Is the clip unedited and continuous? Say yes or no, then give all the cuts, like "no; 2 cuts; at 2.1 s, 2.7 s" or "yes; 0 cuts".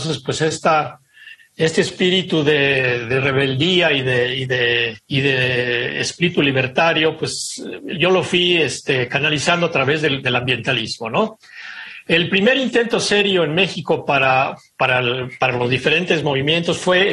no; 1 cut; at 5.0 s